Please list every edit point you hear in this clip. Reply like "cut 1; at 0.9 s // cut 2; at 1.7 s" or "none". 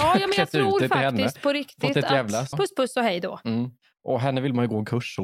cut 1; at 2.5 s